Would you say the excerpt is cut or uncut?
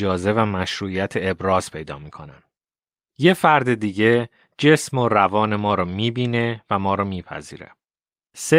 uncut